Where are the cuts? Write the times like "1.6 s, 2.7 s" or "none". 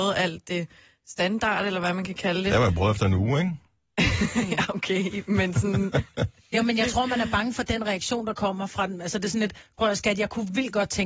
none